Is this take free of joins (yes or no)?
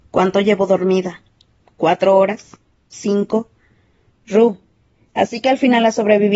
no